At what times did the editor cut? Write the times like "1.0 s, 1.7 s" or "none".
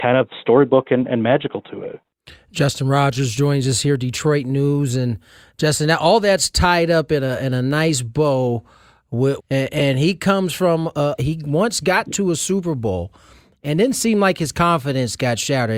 9.4 s, 11.2 s